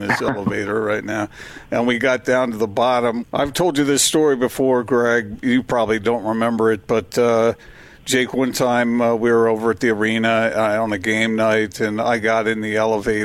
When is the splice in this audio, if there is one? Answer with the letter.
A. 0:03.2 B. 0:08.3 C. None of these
A